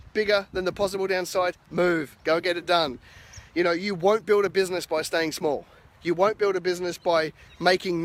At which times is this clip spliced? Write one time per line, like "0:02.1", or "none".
none